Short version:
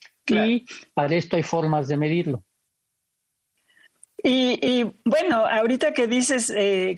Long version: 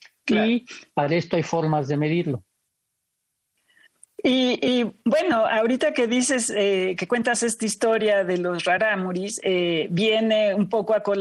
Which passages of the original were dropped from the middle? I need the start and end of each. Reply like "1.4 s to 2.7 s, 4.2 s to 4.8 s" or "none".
none

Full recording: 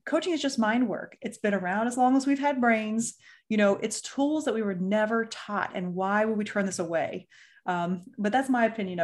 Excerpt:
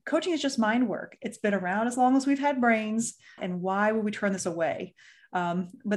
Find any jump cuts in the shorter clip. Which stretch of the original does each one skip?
3.4 s to 5.7 s

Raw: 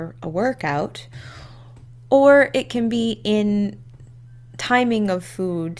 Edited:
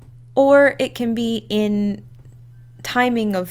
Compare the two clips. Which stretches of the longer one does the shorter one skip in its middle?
none

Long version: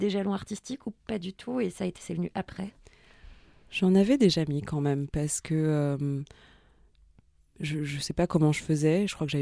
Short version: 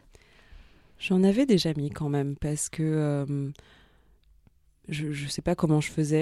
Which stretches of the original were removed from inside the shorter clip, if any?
none

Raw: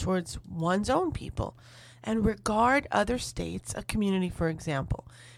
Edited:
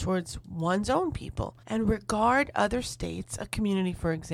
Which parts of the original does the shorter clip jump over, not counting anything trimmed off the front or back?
1.6 s to 2.0 s

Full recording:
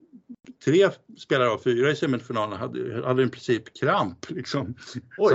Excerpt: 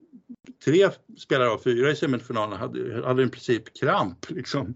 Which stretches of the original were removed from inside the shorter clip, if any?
none

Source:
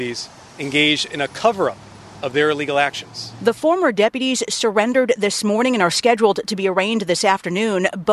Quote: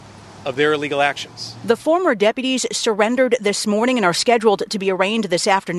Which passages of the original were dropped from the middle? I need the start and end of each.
none

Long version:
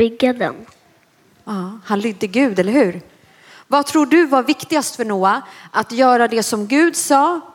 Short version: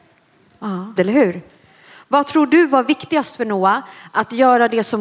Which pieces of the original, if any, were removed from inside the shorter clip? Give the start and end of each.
1.8 s to 2.6 s

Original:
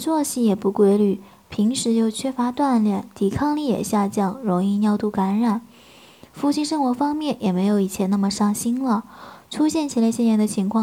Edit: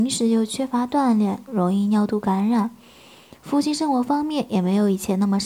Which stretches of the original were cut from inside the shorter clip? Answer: 3.1 s to 4.4 s

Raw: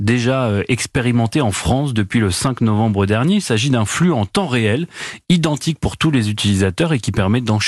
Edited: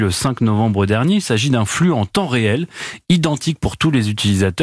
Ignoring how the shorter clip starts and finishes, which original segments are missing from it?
none

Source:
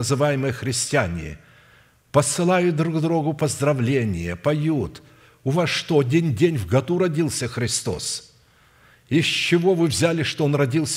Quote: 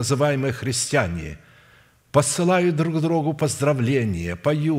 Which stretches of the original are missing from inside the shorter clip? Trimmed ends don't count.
none

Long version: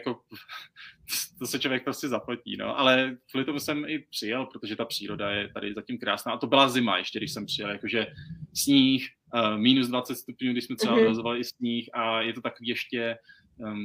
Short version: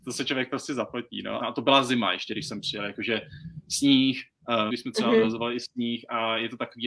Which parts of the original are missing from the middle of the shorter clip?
2.7 s to 6.3 s, 9.6 s to 10.5 s

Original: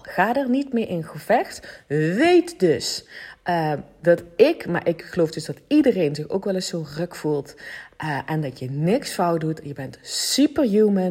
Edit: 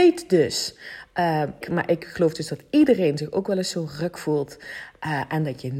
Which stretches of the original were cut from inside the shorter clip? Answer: 3.9 s to 4.6 s

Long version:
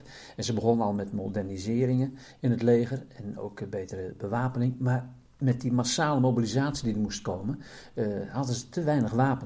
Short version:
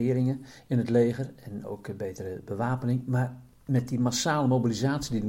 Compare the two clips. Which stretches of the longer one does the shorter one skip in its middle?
none

